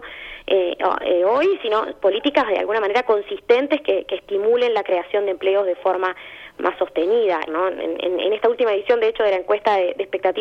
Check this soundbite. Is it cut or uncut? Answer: cut